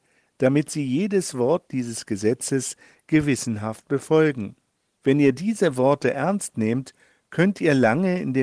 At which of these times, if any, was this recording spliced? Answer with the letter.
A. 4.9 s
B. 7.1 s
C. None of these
A